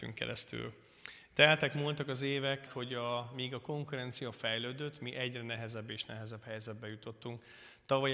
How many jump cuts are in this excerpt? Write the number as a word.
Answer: one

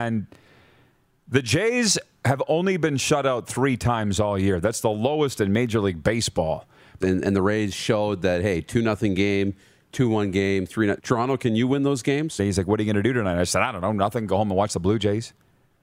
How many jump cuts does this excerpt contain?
three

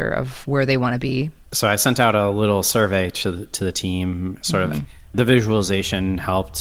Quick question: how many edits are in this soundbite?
two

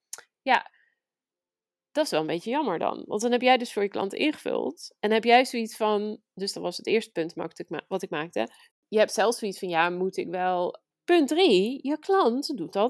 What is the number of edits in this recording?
two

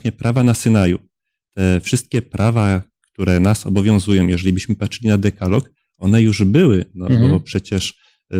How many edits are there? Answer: zero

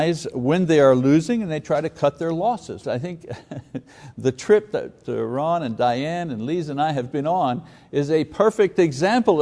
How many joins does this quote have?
two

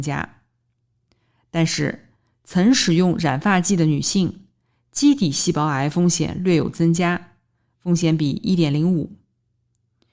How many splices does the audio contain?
zero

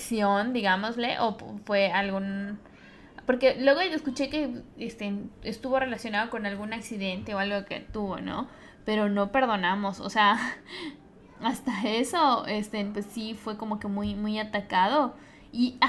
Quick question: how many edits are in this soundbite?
zero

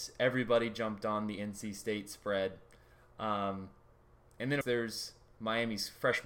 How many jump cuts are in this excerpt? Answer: one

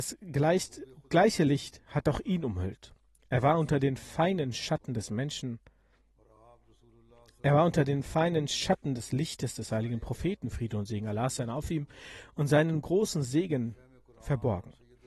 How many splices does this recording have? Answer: zero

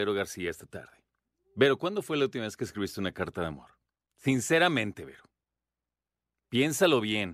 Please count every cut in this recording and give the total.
zero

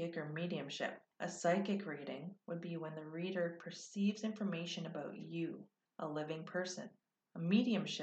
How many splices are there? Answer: one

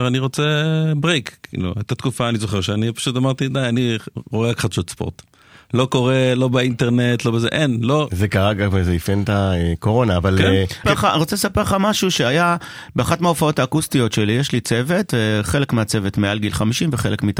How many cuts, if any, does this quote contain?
one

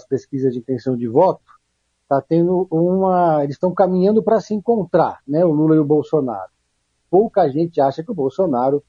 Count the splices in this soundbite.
one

